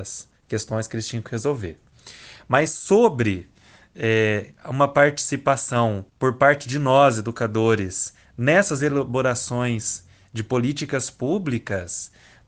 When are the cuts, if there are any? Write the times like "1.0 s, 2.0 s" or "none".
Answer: 6.1 s